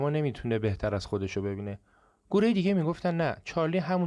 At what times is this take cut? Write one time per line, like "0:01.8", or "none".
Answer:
none